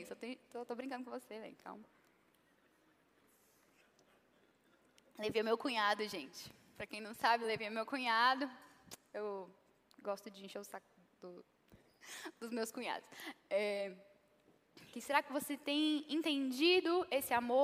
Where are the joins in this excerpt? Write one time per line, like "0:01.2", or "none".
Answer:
0:13.4
0:14.9